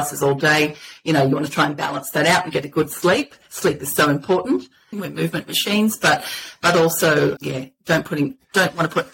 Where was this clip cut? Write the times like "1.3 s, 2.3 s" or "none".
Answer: 4.9 s, 7.4 s